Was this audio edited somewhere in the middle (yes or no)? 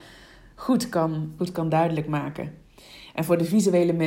yes